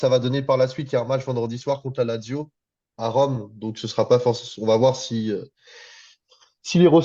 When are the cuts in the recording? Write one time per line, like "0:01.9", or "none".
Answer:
none